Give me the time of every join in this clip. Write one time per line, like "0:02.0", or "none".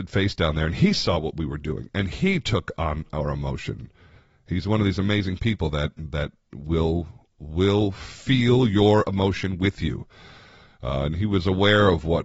none